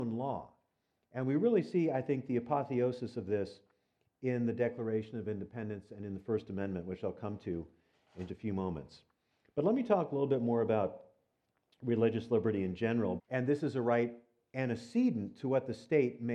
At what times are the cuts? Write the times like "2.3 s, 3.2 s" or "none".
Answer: 8.3 s, 13.2 s